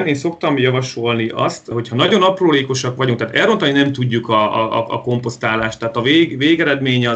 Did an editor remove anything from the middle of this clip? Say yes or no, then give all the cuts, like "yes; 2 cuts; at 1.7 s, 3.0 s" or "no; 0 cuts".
no; 0 cuts